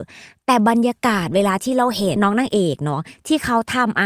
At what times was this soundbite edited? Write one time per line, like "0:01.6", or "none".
0:02.2